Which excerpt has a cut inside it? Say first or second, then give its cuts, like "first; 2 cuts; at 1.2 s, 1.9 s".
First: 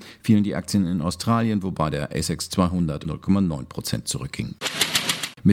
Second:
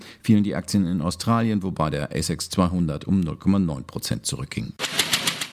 first; 1 cut; at 3.0 s